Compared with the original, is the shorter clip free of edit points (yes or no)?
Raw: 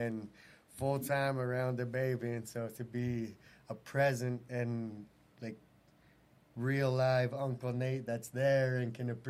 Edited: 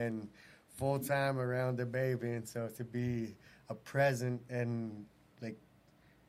yes